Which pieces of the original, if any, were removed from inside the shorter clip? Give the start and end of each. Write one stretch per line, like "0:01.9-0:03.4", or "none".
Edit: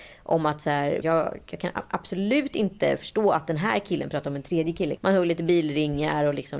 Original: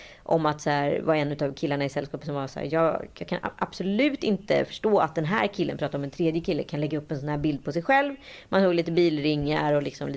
0:01.0-0:02.7
0:06.6-0:08.4